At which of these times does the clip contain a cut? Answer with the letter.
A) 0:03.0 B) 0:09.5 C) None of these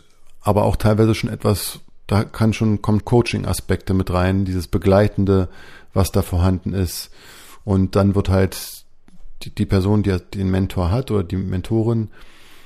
A